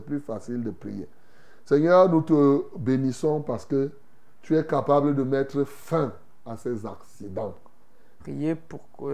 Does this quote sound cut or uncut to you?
cut